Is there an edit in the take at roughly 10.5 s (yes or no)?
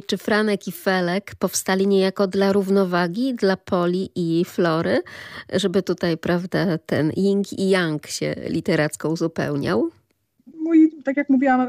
yes